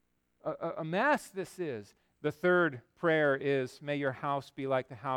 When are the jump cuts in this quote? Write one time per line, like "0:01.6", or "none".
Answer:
0:02.1